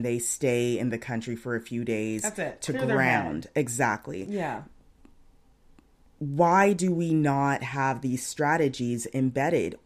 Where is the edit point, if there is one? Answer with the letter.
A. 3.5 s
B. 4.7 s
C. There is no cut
C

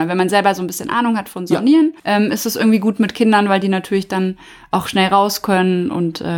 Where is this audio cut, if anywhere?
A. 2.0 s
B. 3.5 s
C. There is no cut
A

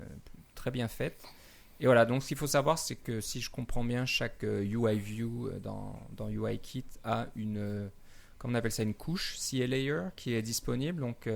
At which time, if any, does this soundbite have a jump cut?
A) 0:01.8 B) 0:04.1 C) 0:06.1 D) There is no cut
D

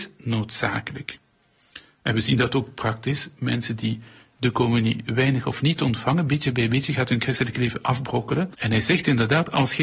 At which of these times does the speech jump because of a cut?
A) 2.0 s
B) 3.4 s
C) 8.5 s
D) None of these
C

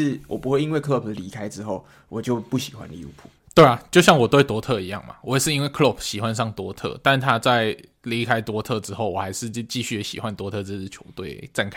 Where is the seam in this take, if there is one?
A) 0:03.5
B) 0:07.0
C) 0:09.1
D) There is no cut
D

